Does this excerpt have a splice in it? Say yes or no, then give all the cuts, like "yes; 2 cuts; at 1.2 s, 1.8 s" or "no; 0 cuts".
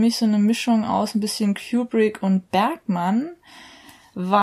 no; 0 cuts